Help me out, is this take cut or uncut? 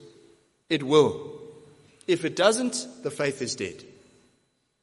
uncut